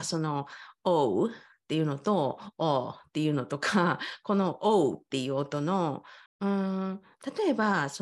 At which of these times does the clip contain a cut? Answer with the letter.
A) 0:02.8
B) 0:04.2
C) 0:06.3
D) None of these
C